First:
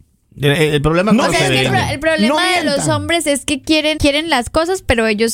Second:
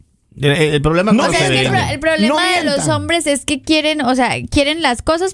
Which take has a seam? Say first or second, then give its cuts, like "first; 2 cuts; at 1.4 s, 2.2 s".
first; 1 cut; at 4.0 s